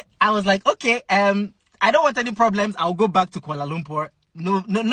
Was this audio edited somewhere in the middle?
no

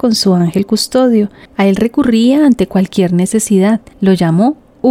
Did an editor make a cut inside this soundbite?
yes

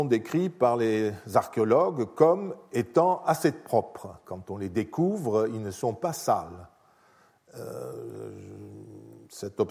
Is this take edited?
no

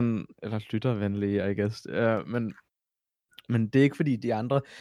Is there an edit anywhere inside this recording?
no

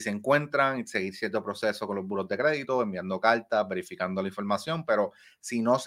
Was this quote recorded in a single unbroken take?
yes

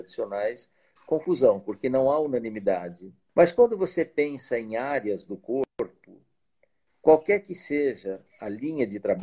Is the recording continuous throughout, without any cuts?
no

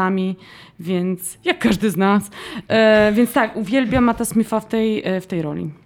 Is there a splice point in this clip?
no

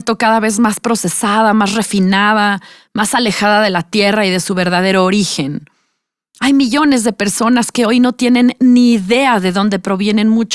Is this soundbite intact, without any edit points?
yes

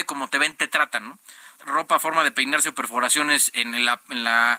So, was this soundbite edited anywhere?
yes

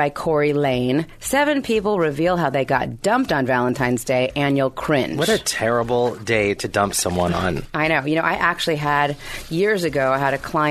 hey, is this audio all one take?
yes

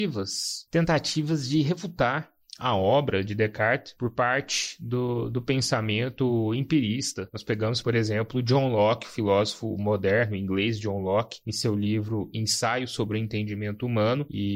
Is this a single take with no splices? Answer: yes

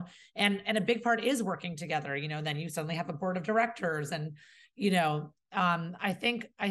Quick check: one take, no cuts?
yes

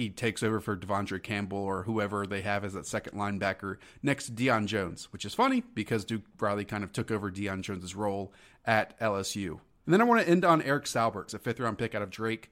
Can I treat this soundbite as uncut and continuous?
no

